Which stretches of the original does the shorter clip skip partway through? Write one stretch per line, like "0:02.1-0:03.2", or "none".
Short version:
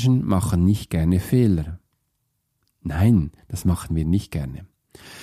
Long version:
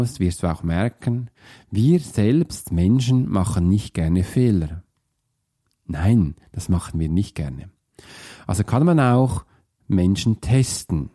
none

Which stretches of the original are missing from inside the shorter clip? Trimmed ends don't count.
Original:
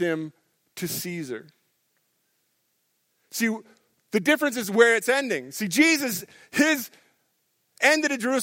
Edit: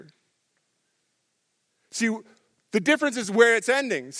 none

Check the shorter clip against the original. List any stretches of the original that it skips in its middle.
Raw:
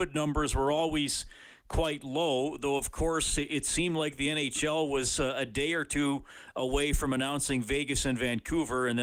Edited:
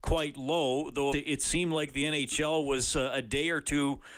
0:02.8-0:03.4

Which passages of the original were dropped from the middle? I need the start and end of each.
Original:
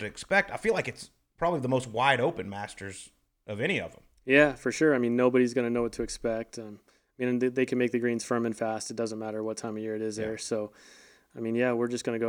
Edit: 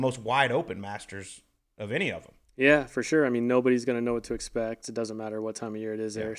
0:06.5-0:08.8

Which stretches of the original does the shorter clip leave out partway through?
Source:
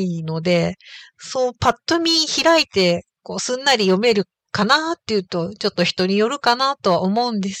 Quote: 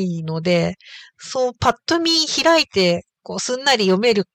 none

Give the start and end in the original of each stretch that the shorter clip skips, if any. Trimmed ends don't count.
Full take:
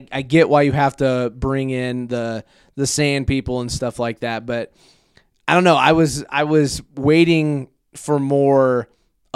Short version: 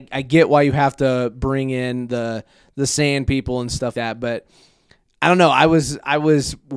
0:03.9-0:04.2

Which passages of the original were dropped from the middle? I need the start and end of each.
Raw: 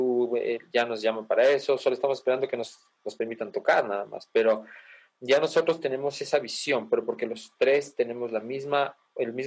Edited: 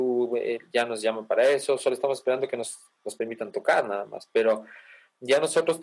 none

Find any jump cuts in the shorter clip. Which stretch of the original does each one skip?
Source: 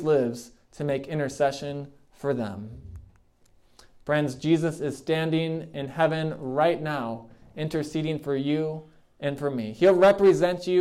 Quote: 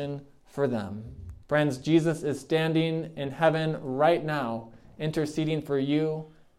0:03.1-0:04.0

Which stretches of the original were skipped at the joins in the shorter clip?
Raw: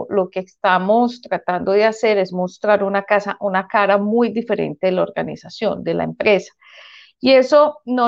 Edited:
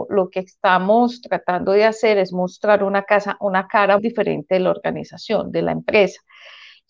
0:04.0-0:04.3

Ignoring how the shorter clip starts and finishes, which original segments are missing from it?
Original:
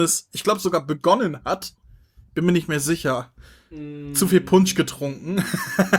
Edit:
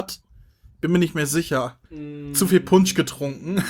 0:03.4-0:03.7

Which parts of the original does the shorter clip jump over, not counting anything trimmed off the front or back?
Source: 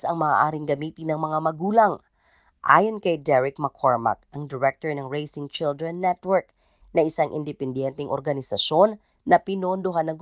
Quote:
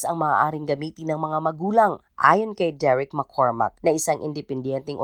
0:02.1-0:02.5
0:04.3-0:06.9

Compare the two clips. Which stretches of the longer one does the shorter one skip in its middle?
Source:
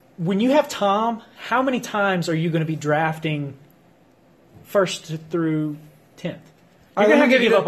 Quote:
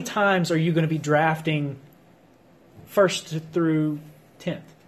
none

